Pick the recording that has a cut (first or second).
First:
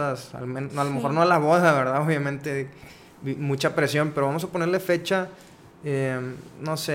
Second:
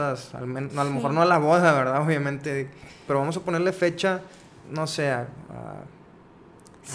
second